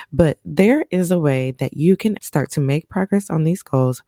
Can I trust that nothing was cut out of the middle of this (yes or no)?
no